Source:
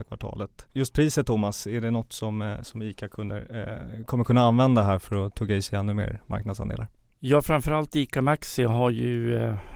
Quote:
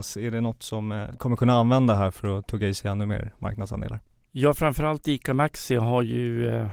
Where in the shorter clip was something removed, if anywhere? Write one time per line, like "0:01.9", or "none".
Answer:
0:01.1